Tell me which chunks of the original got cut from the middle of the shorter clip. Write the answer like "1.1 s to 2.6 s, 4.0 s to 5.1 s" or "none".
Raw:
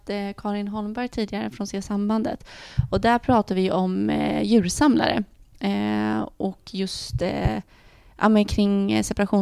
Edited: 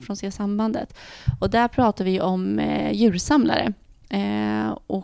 none